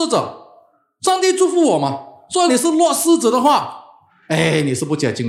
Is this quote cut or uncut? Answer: cut